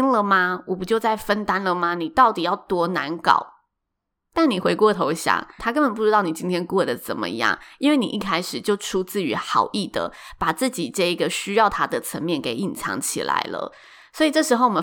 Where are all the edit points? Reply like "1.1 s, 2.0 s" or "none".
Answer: 5.6 s